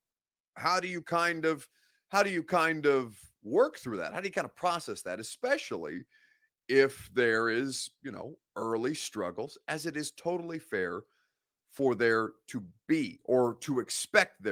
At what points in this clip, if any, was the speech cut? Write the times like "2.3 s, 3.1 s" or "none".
none